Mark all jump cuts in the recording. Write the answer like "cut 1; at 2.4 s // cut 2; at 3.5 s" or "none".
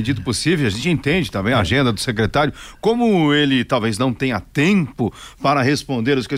none